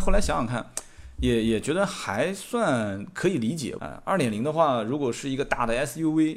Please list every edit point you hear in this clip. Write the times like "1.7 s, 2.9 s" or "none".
3.8 s